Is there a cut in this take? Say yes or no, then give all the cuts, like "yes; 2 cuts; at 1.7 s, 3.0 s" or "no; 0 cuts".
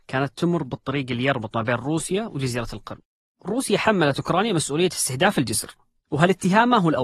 no; 0 cuts